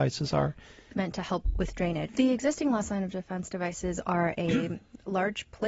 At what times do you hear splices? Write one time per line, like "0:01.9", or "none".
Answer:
0:00.9
0:02.1